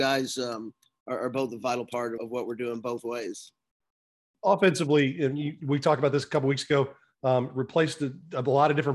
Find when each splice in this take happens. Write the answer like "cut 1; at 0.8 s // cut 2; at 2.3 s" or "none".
cut 1; at 2.2 s